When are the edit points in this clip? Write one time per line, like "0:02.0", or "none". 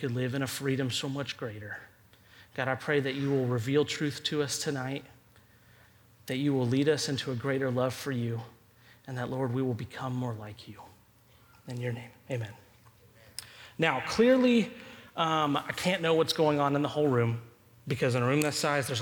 none